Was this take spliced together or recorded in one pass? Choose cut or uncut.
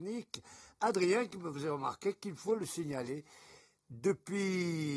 uncut